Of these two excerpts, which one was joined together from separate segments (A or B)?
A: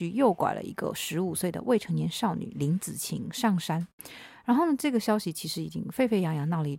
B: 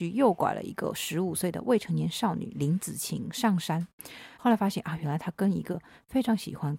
B